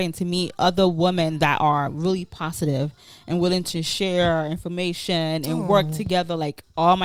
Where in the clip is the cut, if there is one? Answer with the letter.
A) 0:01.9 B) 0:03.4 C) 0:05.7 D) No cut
D